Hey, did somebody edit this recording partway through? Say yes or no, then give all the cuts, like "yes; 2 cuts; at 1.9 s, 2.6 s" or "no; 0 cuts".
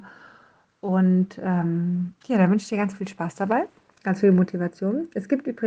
no; 0 cuts